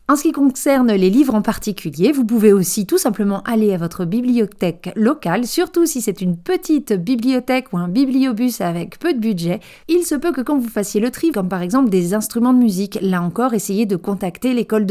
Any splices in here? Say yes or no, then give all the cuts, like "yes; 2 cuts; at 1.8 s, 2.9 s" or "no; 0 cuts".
yes; 2 cuts; at 9.8 s, 11.3 s